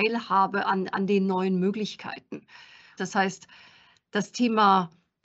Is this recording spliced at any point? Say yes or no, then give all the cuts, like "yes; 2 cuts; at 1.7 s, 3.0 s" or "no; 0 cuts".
yes; 1 cut; at 3.0 s